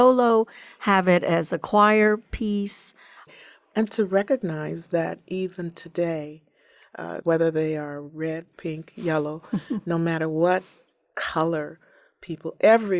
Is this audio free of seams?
no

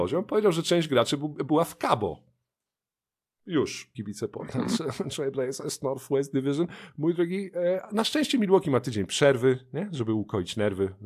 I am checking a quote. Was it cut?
yes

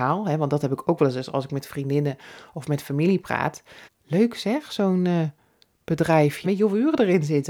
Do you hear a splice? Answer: yes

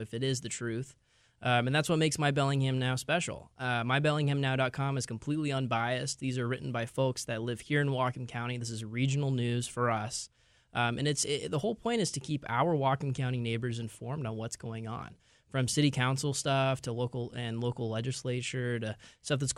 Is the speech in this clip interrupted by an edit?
no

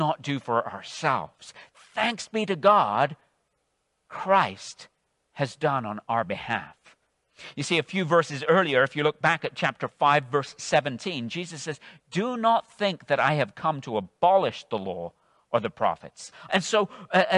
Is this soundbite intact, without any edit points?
no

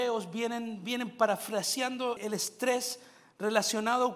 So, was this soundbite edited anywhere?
yes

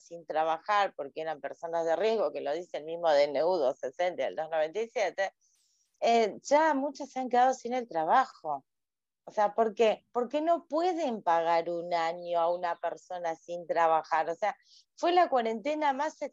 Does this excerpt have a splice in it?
yes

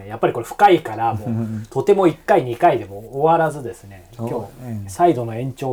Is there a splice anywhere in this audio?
no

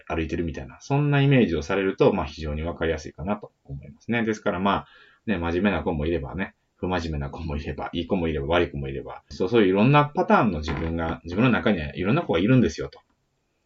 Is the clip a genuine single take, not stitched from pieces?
no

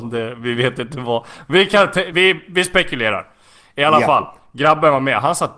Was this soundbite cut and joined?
no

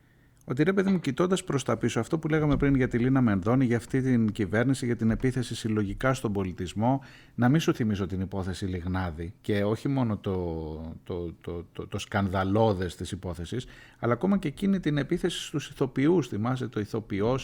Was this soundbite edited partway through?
yes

